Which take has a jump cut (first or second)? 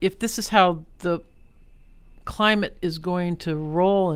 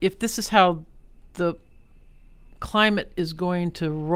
first